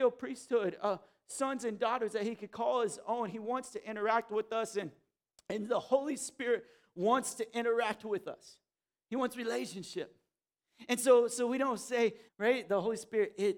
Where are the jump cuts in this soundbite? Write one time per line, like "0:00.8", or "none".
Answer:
0:12.3

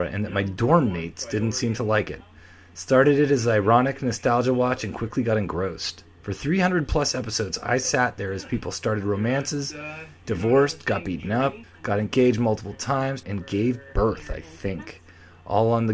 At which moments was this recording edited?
0:11.6
0:13.2

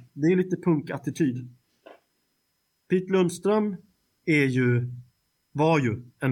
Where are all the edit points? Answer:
none

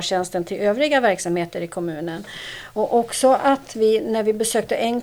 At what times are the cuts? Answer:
none

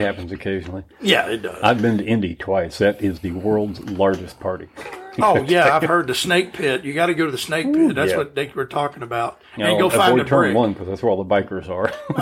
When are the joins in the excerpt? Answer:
none

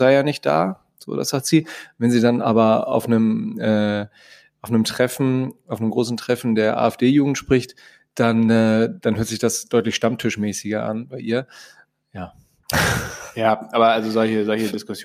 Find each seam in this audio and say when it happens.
none

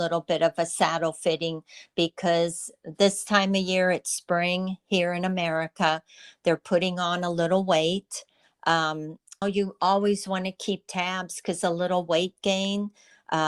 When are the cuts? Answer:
0:09.4

